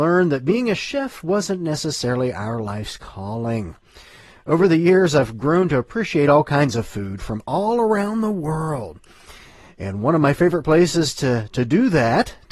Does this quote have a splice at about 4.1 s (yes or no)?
no